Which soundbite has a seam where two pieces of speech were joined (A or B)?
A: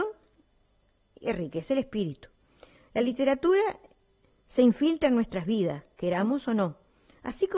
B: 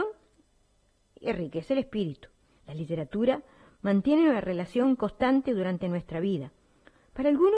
B